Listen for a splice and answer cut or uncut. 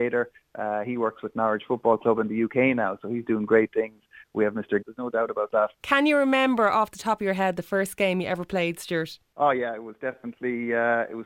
cut